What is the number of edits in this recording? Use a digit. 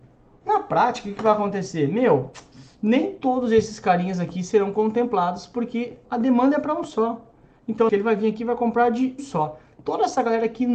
3